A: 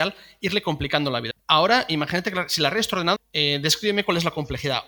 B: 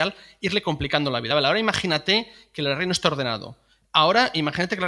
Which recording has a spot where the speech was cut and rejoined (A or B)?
A